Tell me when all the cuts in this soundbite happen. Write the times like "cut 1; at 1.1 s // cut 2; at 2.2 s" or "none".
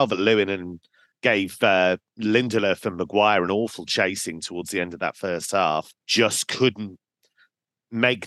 cut 1; at 6.0 s

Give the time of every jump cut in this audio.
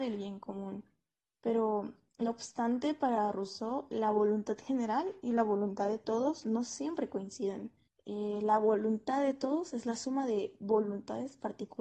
cut 1; at 7.9 s

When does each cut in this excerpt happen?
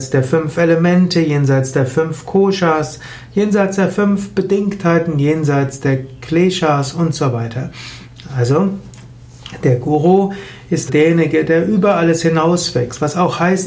cut 1; at 10.9 s

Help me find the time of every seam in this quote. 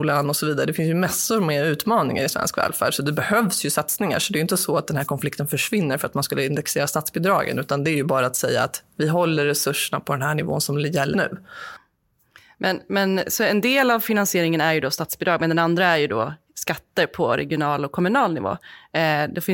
cut 1; at 11.1 s

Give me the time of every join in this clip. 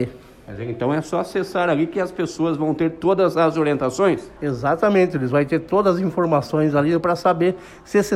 cut 1; at 4.4 s // cut 2; at 7.0 s

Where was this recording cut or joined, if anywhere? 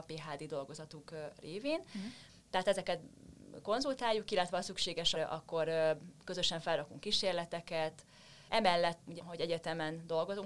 cut 1; at 5.1 s // cut 2; at 9.2 s

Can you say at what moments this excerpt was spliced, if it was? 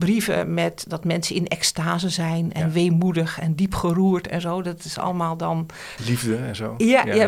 cut 1; at 6.0 s

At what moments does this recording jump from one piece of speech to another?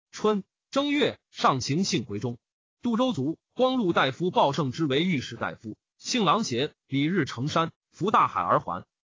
cut 1; at 5.9 s // cut 2; at 7.8 s

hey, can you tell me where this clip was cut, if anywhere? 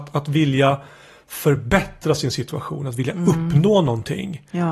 none

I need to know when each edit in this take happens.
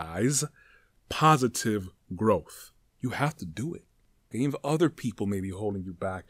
cut 1; at 2.8 s // cut 2; at 4.3 s

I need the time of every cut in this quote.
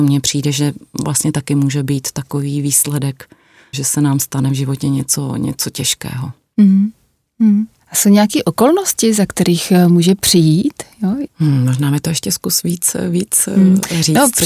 cut 1; at 3.7 s // cut 2; at 11.3 s

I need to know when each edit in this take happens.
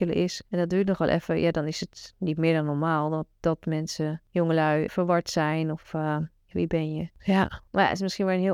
cut 1; at 4.9 s // cut 2; at 6.5 s

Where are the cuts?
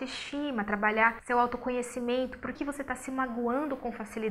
cut 1; at 2.5 s

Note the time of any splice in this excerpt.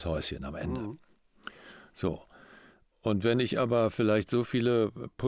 none

